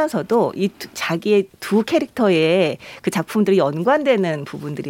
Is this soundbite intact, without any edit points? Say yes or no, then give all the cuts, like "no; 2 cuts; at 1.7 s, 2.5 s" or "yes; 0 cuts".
no; 1 cut; at 1.5 s